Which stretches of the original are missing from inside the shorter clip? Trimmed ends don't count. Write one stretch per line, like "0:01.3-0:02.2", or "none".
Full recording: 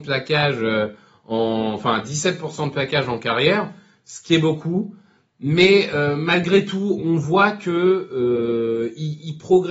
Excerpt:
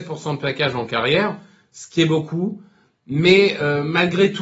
none